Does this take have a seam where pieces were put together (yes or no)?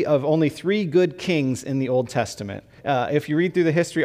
yes